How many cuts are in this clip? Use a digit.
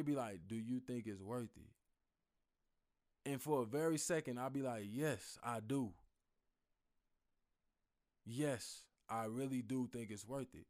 0